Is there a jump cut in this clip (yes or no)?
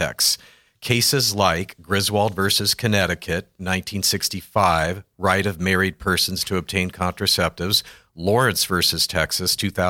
no